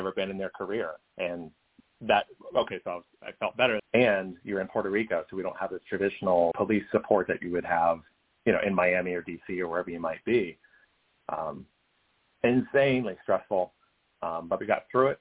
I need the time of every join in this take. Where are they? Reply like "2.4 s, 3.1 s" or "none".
3.8 s, 6.5 s

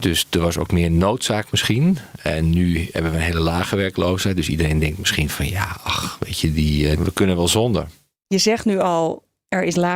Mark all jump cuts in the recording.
7.0 s

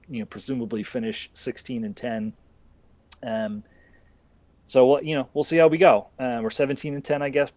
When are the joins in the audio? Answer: none

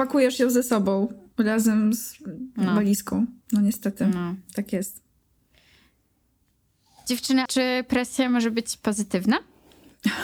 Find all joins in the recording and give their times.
3.4 s, 7.5 s

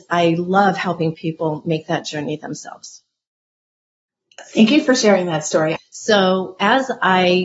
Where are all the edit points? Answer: 5.8 s

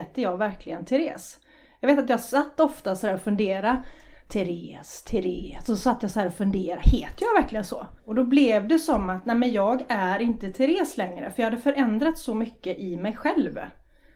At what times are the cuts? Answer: 8.0 s

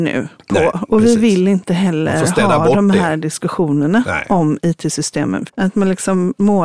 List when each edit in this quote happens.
5.5 s

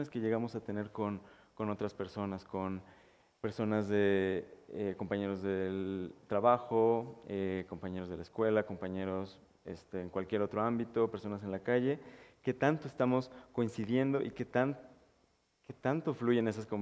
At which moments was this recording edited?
none

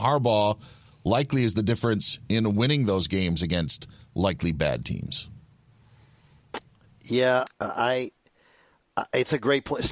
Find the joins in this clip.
7.5 s

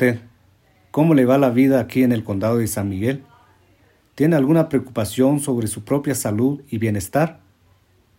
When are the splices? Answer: none

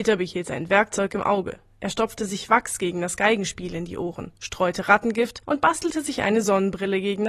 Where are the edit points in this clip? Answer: none

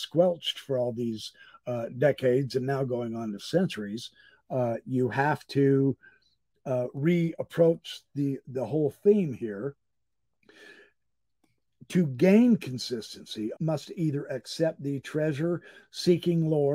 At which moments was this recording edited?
13.5 s

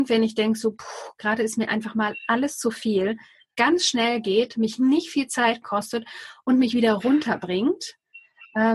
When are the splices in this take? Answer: none

